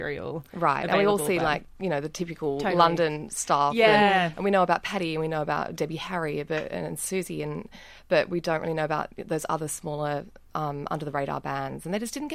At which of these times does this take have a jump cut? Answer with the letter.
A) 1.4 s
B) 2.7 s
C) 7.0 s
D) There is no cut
D